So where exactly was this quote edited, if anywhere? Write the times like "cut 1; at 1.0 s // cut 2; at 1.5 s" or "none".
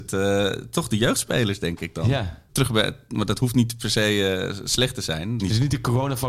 cut 1; at 2.5 s // cut 2; at 5.4 s

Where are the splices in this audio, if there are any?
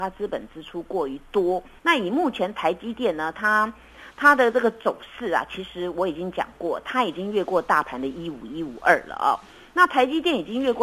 cut 1; at 1.8 s

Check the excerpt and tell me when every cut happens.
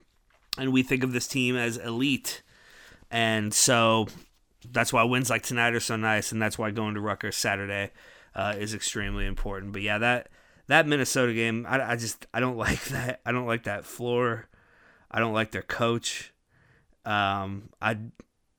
none

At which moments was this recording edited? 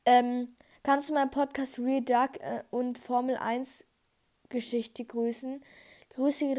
none

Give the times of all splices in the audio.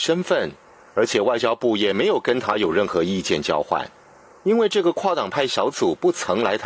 cut 1; at 4.3 s

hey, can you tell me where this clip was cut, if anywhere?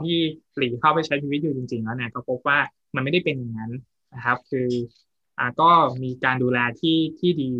none

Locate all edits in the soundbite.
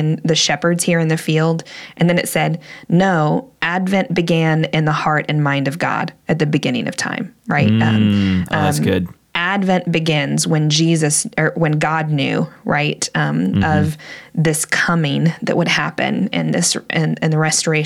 none

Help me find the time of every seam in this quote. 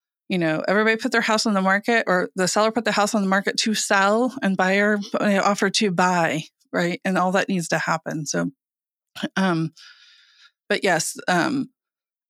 none

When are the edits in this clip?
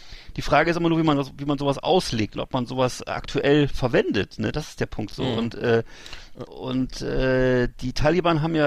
cut 1; at 6.5 s

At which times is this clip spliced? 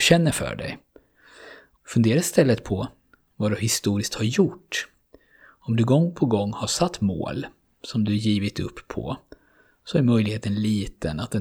cut 1; at 1.8 s

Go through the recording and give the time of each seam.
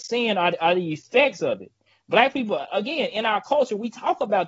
none

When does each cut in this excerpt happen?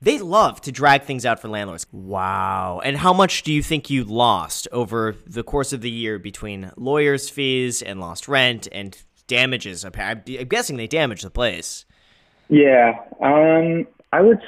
cut 1; at 1.9 s

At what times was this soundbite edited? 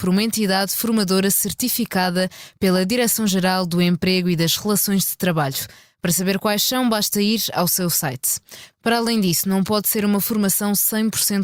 none

